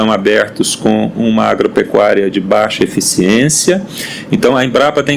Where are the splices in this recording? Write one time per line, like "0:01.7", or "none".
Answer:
none